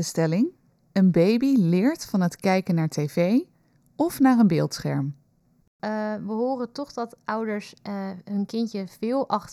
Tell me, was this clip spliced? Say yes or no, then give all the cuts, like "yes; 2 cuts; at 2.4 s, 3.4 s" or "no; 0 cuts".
yes; 1 cut; at 5.6 s